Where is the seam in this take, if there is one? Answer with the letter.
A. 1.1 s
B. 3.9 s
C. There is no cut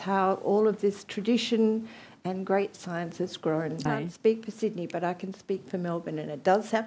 B